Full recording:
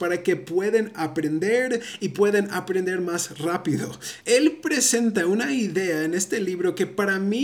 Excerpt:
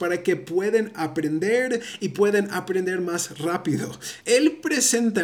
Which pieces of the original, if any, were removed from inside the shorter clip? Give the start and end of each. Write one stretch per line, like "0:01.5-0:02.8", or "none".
none